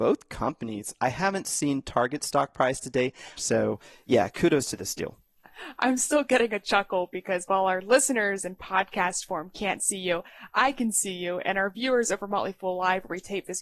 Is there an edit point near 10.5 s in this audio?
no; 1 cut; at 3.4 s

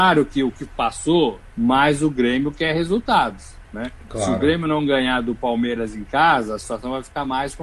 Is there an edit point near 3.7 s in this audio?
no; 1 cut; at 1.5 s

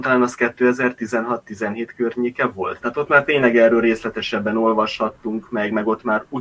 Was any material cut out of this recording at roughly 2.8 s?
yes; 1 cut; at 2.8 s

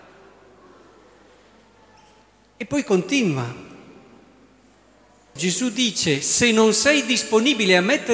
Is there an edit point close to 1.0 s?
no; 1 cut; at 5.4 s

